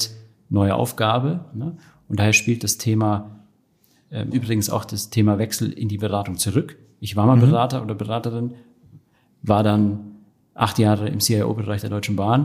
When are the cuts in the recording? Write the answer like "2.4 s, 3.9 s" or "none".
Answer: 4.3 s